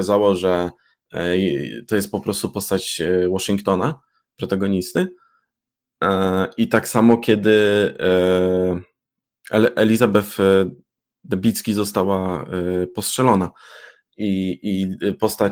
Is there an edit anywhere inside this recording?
no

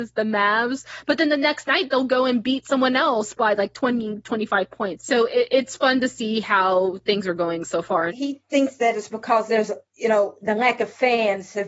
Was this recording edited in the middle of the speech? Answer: yes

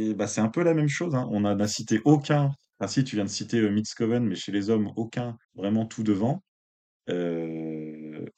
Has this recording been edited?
yes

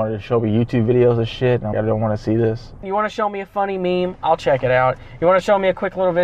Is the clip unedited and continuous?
no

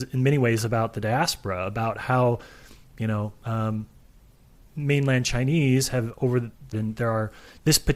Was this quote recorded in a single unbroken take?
no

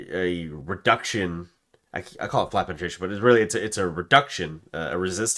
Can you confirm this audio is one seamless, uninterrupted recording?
yes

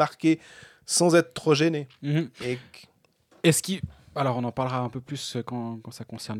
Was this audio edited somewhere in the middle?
no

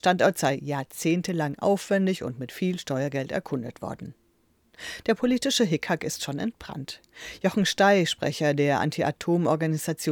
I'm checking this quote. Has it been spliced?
no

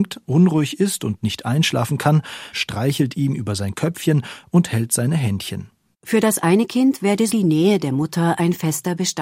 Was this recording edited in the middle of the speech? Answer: yes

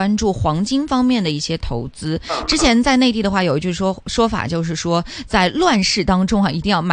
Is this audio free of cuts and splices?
yes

